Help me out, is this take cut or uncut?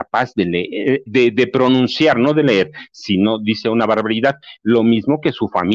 cut